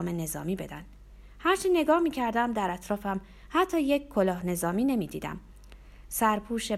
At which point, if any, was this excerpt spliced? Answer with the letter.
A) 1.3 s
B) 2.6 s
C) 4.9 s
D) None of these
D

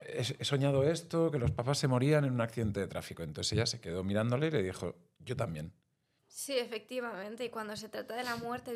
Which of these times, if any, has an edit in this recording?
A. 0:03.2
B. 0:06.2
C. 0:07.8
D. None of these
B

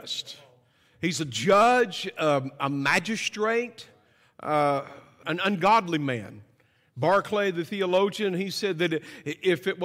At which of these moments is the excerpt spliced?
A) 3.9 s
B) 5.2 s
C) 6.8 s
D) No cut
B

